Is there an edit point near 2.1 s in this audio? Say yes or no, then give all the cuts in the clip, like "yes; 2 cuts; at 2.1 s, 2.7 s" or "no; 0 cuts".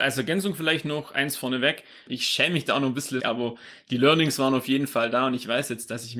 yes; 2 cuts; at 2.1 s, 3.2 s